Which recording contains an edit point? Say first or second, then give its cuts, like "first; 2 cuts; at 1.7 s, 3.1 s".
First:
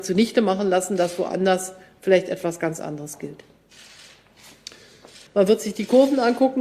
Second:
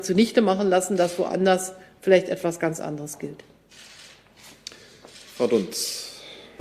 first; 1 cut; at 5.3 s